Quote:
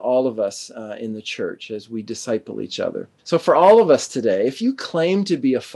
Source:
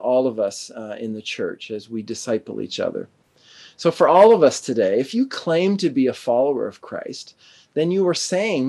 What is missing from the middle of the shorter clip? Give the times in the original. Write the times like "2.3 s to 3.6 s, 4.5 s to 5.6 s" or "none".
3.2 s to 3.7 s